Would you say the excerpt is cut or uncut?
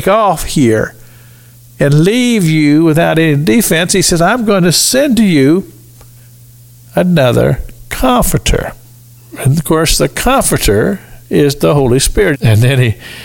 cut